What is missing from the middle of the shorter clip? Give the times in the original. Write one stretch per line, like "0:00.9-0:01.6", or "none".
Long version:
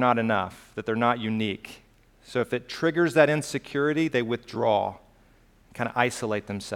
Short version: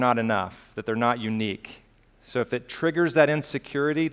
none